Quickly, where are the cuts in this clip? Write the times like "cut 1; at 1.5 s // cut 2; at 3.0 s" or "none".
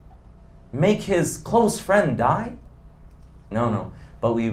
cut 1; at 3.5 s